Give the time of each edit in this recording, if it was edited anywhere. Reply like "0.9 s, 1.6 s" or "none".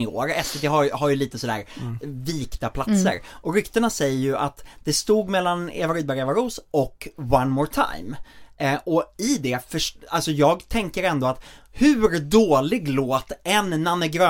none